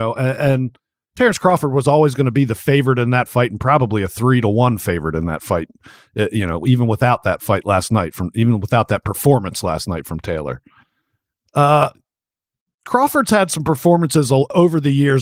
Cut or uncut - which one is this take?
uncut